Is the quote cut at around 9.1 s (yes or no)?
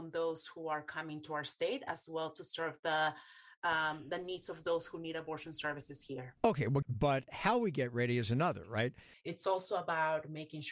yes